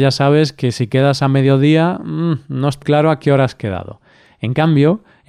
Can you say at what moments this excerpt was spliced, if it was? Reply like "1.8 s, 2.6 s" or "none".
2.8 s